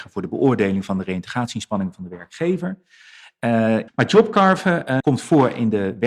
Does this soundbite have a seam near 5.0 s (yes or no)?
yes